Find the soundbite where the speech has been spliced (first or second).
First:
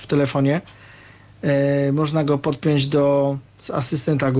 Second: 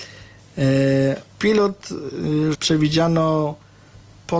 second